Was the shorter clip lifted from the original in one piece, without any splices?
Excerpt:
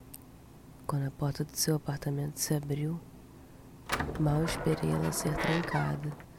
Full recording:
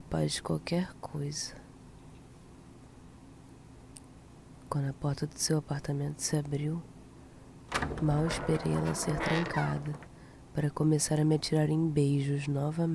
yes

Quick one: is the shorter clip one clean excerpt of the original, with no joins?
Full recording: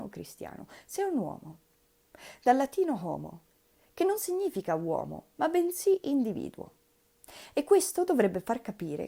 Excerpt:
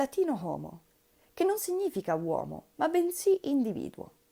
yes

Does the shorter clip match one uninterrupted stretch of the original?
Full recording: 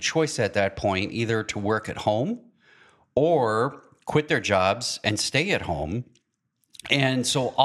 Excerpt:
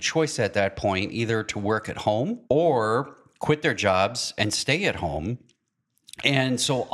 no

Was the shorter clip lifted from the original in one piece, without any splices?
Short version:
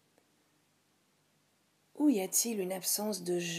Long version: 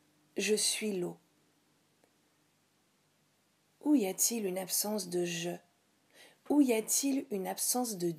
yes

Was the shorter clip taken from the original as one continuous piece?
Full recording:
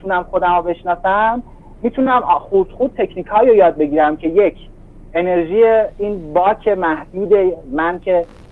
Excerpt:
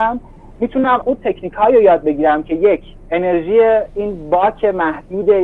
no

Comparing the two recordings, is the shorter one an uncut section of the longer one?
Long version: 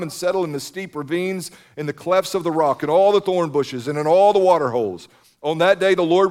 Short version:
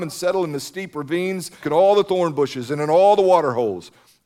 no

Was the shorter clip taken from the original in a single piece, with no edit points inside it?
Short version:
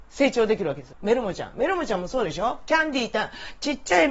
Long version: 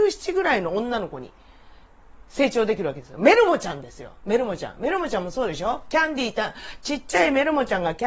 no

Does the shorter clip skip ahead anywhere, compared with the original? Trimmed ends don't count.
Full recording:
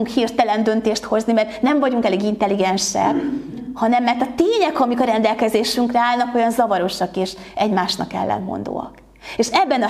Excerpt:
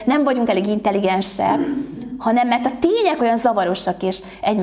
yes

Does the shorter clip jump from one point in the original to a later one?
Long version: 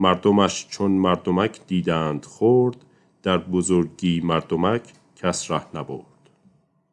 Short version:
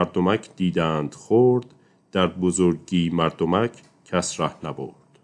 no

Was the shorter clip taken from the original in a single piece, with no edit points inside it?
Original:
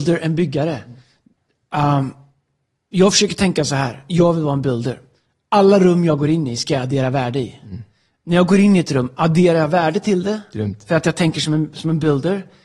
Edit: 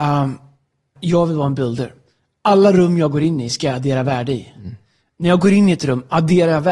no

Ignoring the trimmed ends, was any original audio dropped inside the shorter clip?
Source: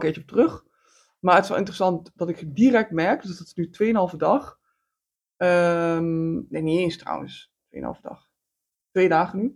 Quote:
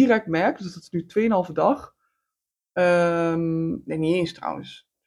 no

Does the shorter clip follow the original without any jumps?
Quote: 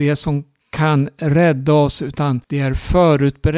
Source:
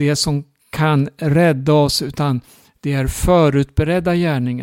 no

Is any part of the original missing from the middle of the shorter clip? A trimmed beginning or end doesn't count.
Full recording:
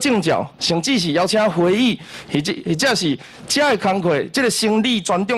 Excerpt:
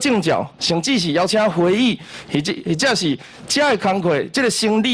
no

